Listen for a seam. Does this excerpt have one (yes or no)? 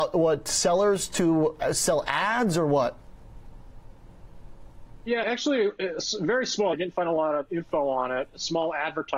yes